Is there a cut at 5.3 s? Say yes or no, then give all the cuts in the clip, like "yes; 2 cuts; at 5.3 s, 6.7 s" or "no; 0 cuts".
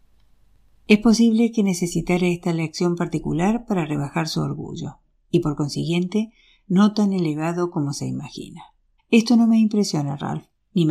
yes; 2 cuts; at 5.3 s, 9.0 s